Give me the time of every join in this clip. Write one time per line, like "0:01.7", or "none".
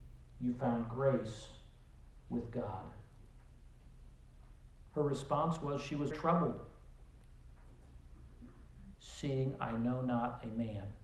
0:06.1
0:08.9